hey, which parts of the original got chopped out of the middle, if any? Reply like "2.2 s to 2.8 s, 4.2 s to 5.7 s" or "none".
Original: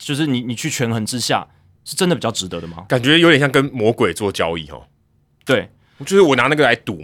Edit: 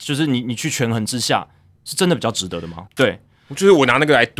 2.9 s to 5.4 s